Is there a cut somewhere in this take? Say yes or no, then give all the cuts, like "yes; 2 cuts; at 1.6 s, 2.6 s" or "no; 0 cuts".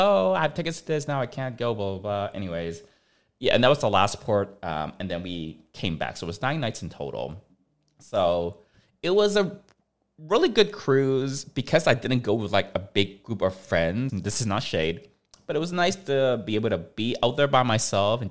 yes; 1 cut; at 14.1 s